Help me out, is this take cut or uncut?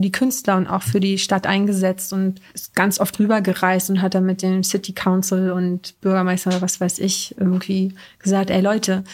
uncut